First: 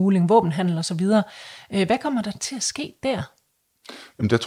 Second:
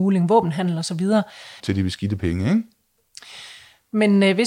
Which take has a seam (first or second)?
second